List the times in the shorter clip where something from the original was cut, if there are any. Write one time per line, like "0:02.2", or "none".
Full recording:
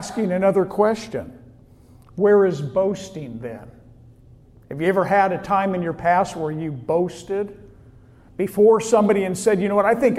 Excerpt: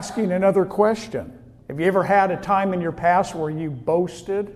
0:01.6